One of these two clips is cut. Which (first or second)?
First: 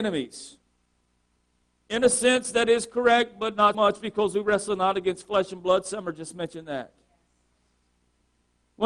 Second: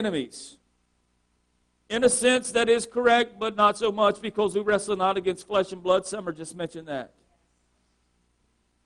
first